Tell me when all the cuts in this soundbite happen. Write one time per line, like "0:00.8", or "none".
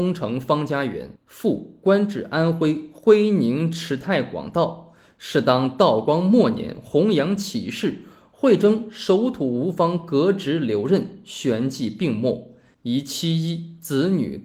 none